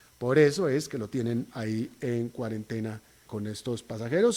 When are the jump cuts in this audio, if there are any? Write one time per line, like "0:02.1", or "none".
0:03.3